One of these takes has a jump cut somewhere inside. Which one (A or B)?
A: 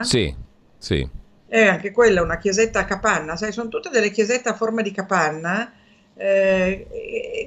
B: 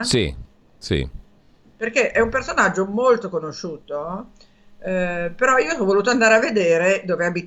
A